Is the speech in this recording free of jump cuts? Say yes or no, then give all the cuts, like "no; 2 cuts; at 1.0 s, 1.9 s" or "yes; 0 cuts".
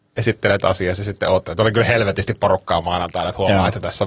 yes; 0 cuts